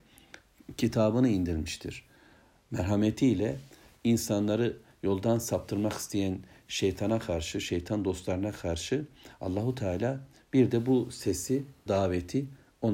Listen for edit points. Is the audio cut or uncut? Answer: cut